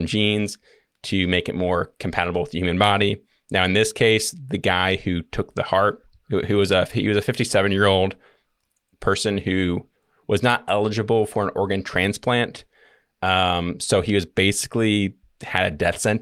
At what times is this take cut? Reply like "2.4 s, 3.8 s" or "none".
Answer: none

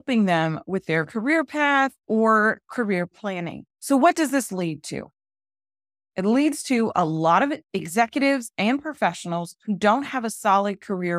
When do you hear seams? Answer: 3.7 s

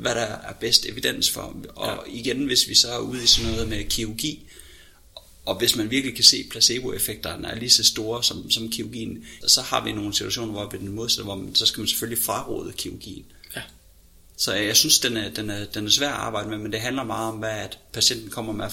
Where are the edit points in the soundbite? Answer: 9.4 s

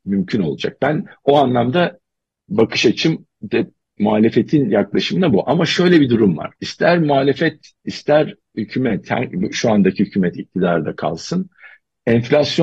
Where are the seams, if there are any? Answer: 6.6 s

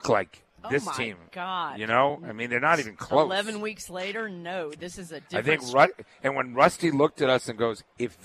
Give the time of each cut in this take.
none

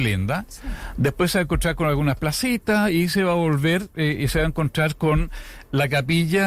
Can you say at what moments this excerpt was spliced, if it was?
none

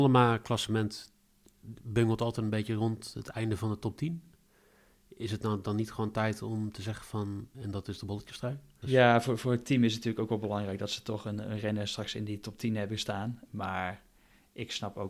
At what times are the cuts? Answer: 7.5 s, 8.8 s, 13.5 s

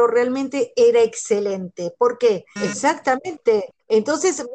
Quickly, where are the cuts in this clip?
2.6 s

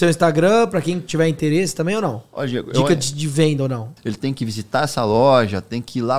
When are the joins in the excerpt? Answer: 4.0 s

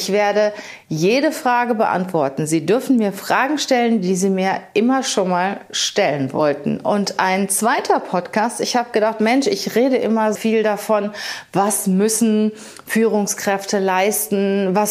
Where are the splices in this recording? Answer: 10.3 s

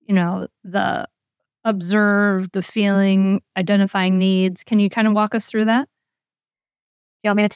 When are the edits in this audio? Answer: none

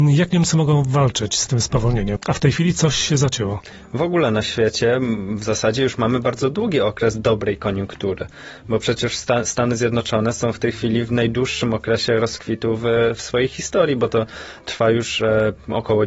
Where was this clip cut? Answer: 2.2 s

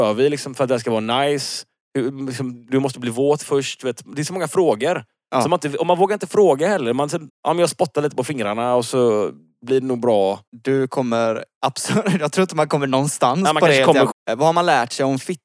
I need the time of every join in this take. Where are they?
7.3 s, 10.5 s, 14.1 s

